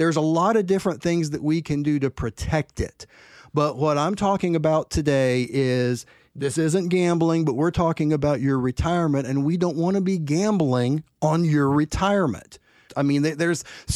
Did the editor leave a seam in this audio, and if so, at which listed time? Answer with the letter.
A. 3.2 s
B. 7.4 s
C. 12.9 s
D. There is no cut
C